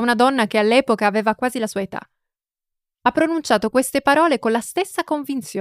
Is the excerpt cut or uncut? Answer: uncut